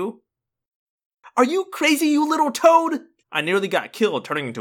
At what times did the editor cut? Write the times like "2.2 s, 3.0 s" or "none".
3.2 s